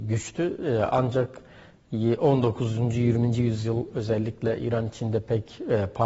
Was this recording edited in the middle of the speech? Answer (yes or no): no